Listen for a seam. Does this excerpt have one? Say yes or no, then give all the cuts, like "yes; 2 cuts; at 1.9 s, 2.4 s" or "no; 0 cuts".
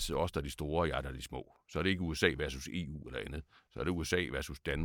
no; 0 cuts